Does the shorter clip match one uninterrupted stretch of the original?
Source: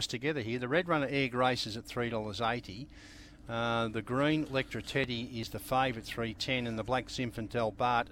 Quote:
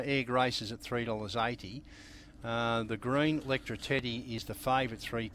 yes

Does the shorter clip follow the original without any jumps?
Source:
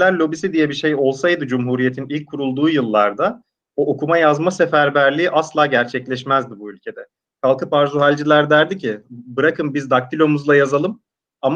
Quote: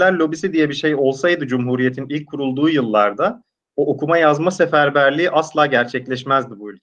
yes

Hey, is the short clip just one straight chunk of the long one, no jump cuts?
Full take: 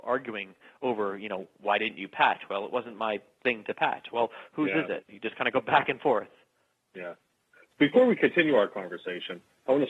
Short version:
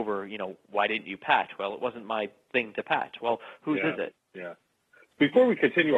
no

